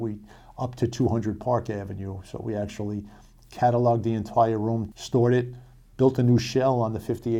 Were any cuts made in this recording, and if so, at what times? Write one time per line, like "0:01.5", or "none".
0:04.9